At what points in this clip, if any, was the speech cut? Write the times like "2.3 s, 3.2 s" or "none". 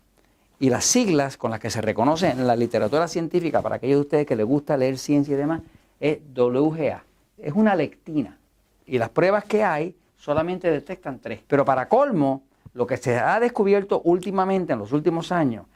7.4 s, 8.8 s, 11.4 s